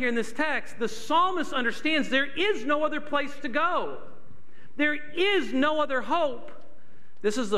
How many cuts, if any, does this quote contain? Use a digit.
0